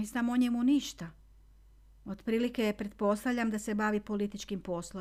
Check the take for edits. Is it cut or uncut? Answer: uncut